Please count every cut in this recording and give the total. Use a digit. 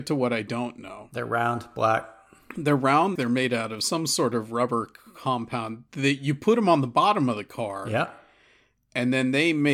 1